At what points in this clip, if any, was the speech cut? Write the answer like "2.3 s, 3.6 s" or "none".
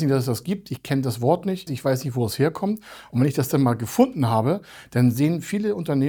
1.7 s